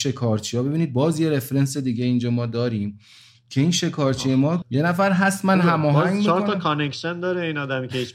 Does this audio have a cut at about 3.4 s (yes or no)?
no